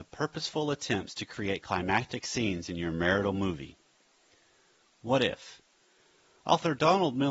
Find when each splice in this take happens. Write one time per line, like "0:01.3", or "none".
none